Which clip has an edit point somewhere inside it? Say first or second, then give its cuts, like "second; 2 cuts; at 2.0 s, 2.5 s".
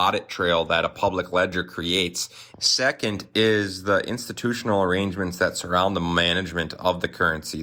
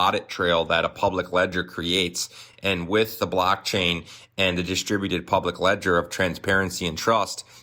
first; 1 cut; at 2.5 s